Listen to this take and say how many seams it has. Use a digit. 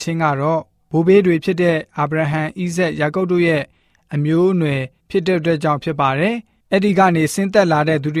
0